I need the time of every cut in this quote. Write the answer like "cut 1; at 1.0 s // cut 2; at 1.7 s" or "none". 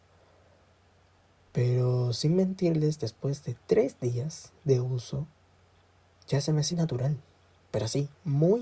cut 1; at 6.7 s

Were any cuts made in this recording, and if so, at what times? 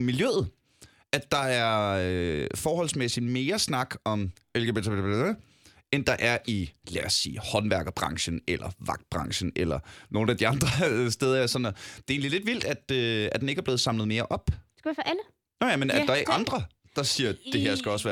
cut 1; at 14.7 s // cut 2; at 16.3 s

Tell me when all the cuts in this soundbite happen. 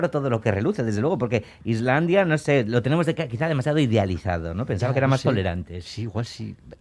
none

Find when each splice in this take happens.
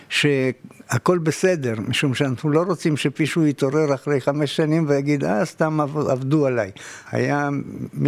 cut 1; at 7.1 s

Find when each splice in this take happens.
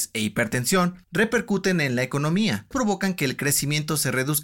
cut 1; at 2.7 s

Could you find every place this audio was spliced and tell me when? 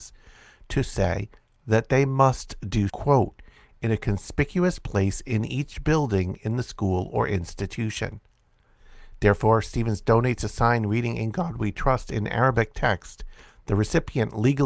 cut 1; at 2.9 s

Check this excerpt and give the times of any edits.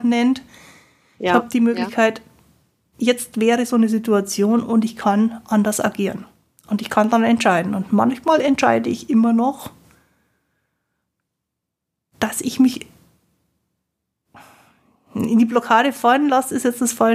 none

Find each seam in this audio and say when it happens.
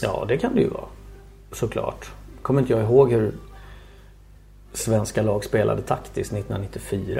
none

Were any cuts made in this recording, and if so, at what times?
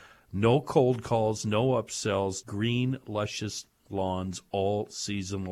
cut 1; at 2.4 s

